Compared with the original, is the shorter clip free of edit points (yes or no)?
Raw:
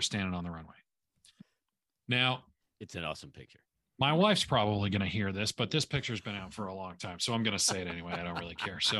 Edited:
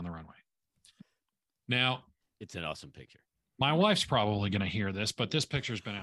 yes